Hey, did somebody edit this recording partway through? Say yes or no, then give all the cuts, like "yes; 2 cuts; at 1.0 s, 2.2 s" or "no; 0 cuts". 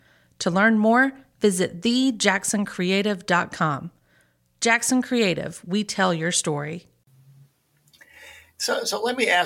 no; 0 cuts